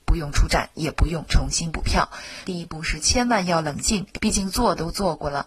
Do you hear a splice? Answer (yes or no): yes